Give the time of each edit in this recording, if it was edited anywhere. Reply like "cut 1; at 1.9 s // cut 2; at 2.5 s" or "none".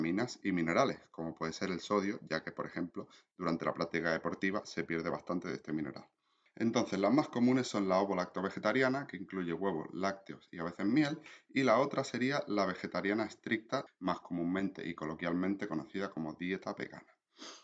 cut 1; at 6.5 s // cut 2; at 13.9 s